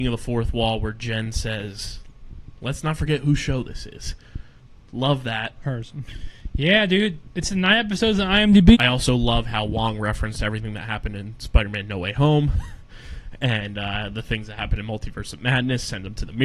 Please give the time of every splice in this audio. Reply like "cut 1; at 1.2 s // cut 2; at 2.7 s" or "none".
cut 1; at 6.1 s // cut 2; at 8.7 s